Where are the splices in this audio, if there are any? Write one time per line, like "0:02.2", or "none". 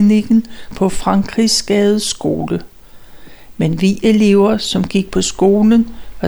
none

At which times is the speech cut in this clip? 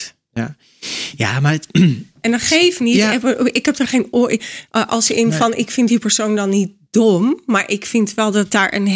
none

